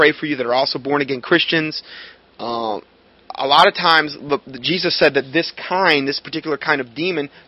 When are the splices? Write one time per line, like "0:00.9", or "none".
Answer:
none